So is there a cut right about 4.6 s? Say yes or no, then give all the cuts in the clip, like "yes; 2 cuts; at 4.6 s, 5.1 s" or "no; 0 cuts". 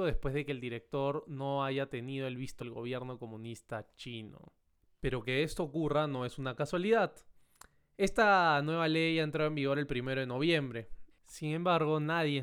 no; 3 cuts; at 2.6 s, 8.0 s, 11.1 s